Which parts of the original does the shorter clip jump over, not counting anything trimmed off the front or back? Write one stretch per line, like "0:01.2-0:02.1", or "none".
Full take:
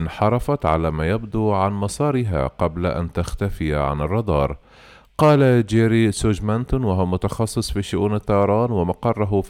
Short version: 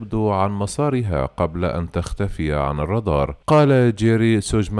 0:04.6-0:05.1